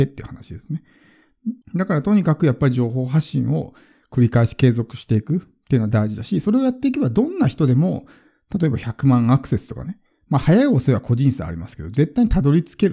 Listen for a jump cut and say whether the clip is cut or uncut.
cut